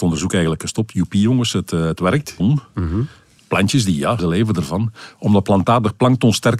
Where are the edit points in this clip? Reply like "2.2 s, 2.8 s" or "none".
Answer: 2.4 s, 4.2 s